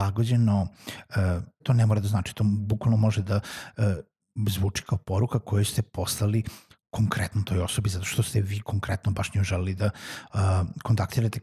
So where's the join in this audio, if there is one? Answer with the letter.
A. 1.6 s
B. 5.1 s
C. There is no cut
A